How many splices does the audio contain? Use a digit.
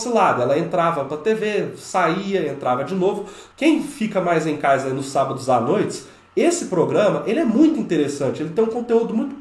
1